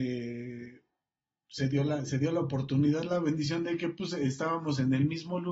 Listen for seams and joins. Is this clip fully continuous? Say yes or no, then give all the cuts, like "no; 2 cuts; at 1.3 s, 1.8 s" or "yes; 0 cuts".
yes; 0 cuts